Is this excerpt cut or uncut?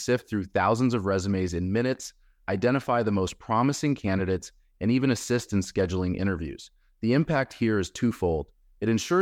uncut